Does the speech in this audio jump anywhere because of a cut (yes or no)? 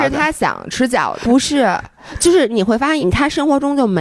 yes